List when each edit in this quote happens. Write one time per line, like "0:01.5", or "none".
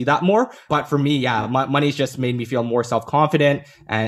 none